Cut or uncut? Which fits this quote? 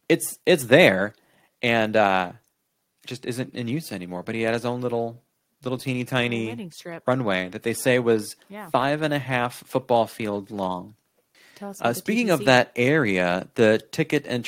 uncut